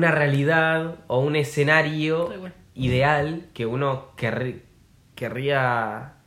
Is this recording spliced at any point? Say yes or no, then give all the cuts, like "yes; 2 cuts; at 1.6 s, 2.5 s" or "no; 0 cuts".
no; 0 cuts